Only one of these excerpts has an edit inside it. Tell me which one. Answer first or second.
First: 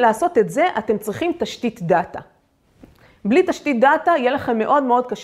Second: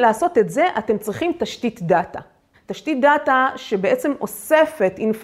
second